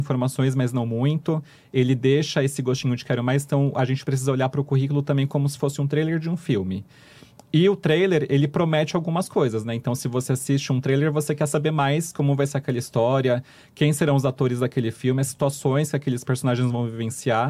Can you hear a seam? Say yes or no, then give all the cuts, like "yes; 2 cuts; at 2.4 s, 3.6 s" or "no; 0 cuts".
no; 0 cuts